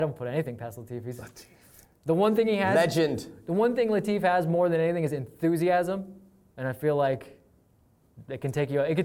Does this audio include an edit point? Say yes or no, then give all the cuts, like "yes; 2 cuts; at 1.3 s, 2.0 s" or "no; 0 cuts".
no; 0 cuts